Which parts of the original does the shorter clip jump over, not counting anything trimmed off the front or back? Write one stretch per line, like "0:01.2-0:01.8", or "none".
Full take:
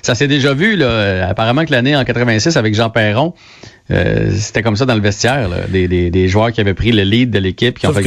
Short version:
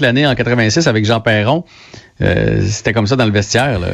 none